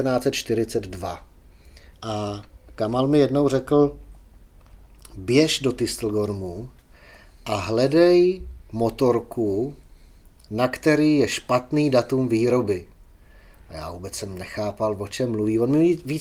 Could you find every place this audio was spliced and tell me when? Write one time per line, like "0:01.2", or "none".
0:01.9